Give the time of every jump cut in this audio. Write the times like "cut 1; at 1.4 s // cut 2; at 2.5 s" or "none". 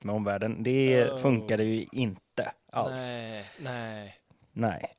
none